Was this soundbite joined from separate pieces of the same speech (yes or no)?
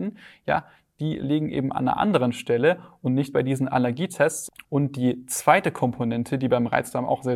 yes